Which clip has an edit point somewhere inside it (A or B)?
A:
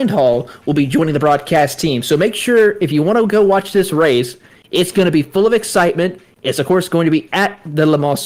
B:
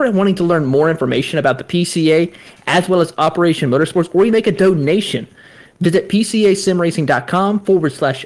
B